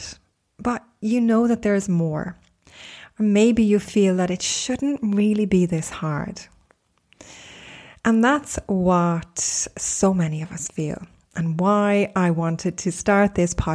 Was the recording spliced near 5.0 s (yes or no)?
no